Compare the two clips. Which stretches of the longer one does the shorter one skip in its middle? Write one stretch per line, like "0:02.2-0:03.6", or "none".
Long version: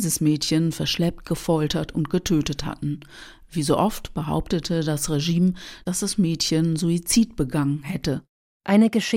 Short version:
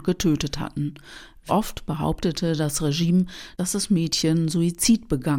0:03.5-0:03.8